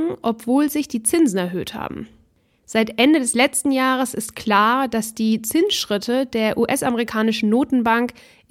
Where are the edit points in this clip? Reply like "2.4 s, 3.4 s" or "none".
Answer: none